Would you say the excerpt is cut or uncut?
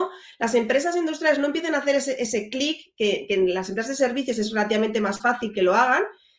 uncut